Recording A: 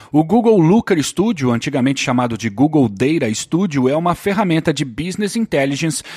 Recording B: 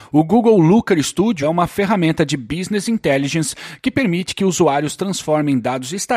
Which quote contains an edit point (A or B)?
B